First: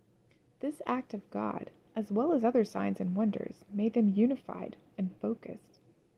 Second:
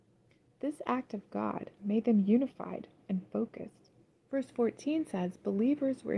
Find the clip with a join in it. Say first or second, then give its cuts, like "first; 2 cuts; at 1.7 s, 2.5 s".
second; 2 cuts; at 1.8 s, 4.3 s